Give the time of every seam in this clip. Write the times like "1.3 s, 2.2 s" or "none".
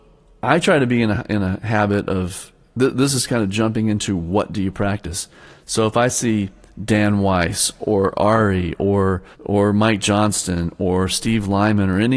5.6 s, 9.3 s